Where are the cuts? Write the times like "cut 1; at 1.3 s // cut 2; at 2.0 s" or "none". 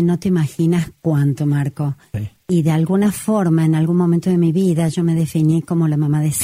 none